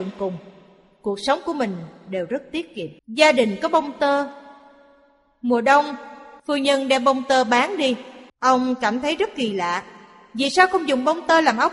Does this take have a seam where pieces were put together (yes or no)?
yes